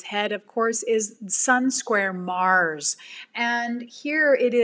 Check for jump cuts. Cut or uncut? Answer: uncut